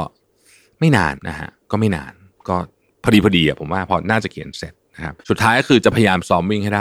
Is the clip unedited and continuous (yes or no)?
no